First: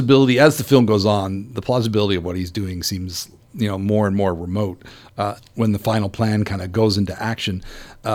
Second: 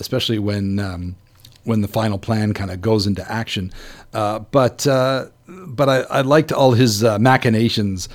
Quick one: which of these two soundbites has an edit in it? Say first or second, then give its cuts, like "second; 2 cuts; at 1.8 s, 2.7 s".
first; 1 cut; at 5.4 s